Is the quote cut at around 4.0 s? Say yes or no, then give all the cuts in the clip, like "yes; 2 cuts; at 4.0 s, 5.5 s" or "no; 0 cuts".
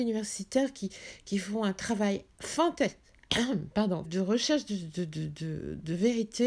yes; 1 cut; at 4.0 s